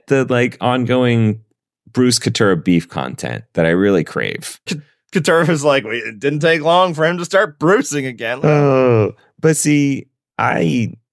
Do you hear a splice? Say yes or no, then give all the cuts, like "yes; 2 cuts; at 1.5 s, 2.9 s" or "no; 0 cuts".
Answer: yes; 2 cuts; at 4.7 s, 8.4 s